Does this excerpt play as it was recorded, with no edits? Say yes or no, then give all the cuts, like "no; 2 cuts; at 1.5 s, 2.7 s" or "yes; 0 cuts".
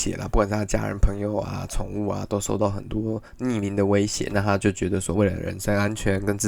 yes; 0 cuts